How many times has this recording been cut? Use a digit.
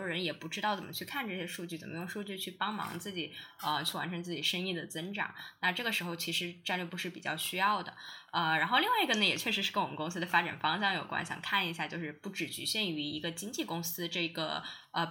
0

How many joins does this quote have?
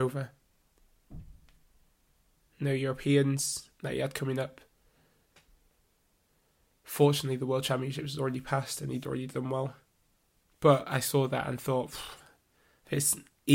0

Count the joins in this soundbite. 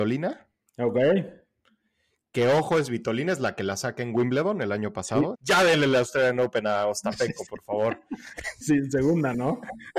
2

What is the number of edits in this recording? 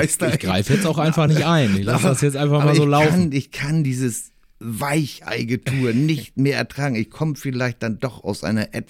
0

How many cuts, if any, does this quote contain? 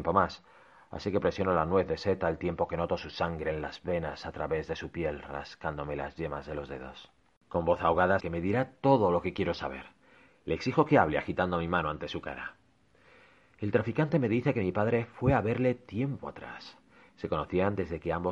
1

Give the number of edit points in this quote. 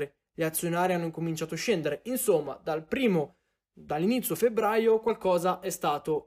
0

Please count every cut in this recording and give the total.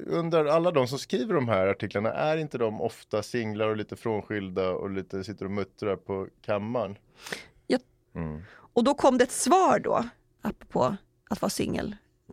2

